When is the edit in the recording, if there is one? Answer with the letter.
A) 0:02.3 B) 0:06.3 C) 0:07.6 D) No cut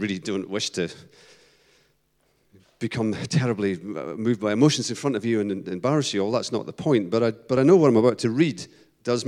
D